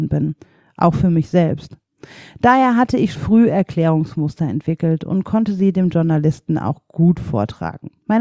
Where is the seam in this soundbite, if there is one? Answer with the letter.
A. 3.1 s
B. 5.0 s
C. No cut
A